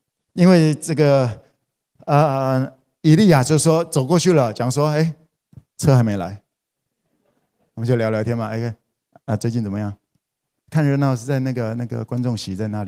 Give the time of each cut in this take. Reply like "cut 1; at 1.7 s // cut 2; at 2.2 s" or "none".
cut 1; at 10.6 s